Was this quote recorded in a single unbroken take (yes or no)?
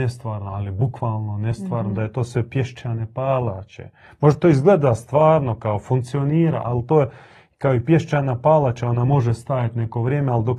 yes